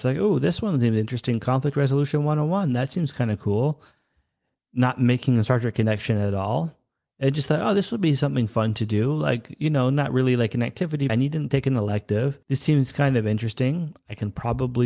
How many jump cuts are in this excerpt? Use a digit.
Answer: 2